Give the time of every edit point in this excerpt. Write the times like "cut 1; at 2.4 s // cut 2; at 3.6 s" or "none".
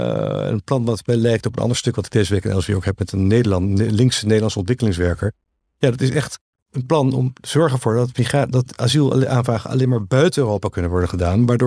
none